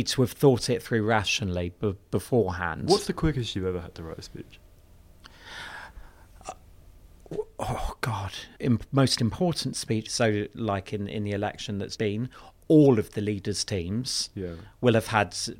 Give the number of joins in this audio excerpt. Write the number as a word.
three